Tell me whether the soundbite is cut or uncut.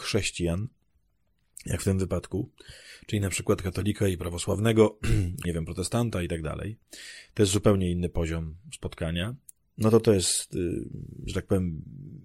cut